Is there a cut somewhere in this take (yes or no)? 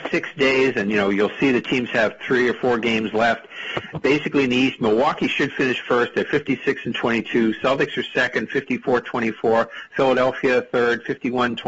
no